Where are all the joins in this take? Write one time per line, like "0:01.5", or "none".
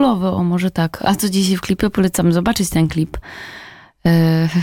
none